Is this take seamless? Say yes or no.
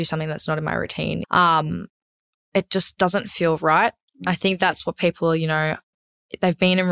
no